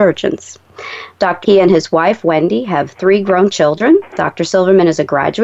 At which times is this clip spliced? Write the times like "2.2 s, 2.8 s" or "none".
1.4 s